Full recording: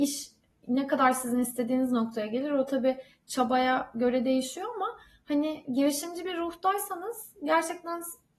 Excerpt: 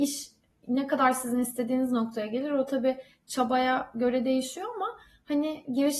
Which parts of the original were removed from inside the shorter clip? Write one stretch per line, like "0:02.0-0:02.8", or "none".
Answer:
none